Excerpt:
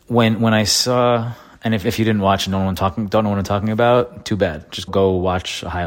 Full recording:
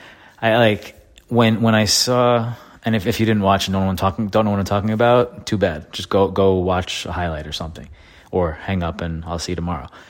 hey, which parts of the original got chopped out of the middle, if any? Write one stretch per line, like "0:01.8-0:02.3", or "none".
0:06.1-0:06.3